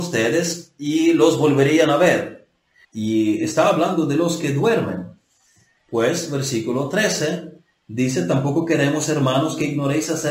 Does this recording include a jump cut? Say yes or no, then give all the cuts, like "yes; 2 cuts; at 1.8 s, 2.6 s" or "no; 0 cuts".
yes; 2 cuts; at 2.8 s, 5.8 s